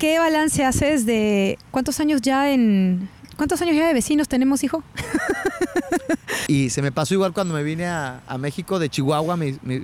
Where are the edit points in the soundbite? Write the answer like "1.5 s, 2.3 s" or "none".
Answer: 6.5 s